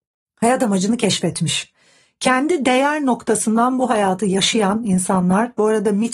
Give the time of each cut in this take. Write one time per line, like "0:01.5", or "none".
none